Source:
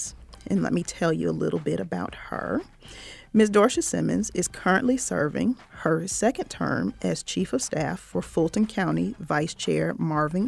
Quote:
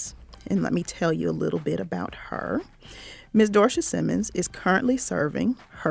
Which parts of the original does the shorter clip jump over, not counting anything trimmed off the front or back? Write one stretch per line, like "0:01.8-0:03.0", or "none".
none